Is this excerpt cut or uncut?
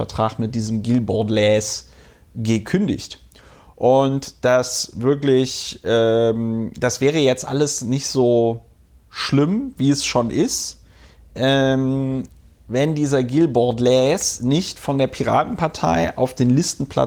uncut